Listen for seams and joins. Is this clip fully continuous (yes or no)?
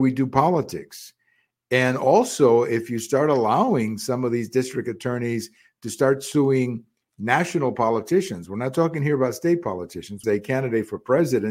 no